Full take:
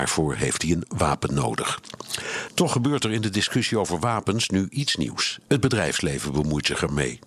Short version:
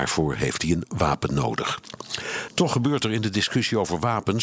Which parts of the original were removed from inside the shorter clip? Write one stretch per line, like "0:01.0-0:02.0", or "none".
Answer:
none